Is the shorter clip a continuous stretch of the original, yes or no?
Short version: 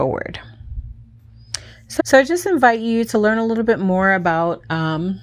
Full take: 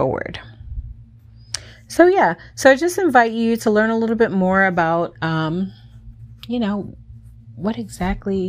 no